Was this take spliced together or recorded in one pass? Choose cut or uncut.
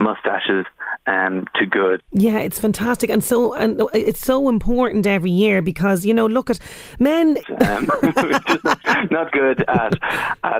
cut